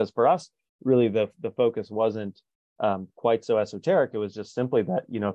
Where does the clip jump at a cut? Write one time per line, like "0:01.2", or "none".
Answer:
none